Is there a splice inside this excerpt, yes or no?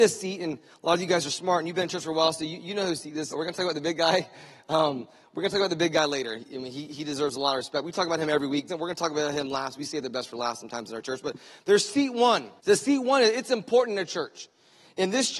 yes